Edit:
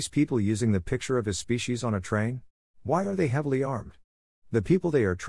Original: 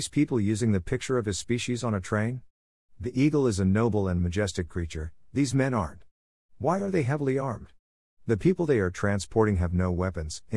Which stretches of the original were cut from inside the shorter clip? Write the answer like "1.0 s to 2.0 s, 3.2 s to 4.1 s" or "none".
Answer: 2.7 s to 6.4 s